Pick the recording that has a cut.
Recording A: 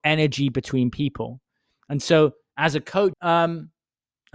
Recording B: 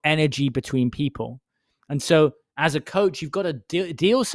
A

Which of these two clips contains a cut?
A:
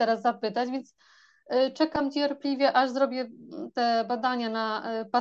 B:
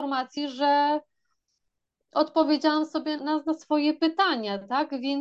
B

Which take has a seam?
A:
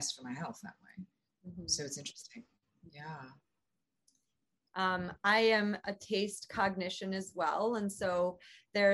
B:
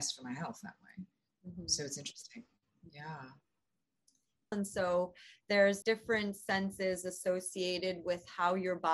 B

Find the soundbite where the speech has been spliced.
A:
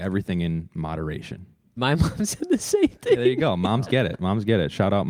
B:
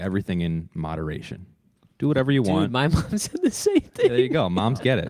A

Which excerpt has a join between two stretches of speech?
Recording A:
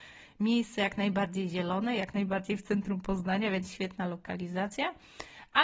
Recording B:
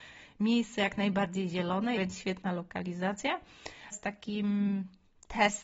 B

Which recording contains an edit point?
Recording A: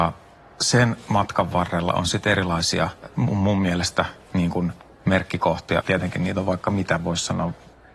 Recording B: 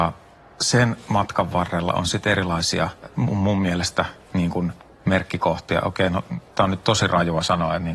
A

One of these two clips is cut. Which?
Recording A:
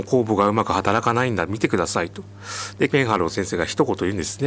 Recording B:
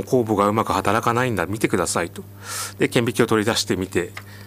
A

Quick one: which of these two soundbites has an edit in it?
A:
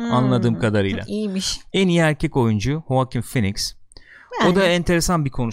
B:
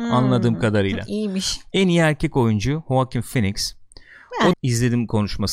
B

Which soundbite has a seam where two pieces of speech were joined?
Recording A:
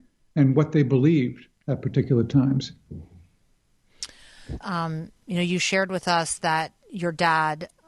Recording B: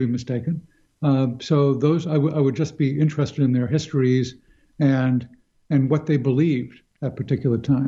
A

